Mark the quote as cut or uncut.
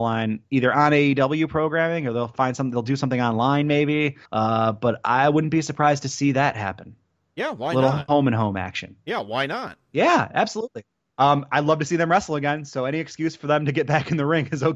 cut